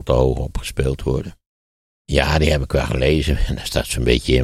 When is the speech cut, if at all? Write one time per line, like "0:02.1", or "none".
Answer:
0:01.9